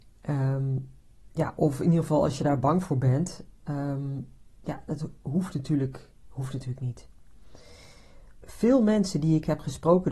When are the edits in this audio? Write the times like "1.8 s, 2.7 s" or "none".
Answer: 6.2 s, 8.4 s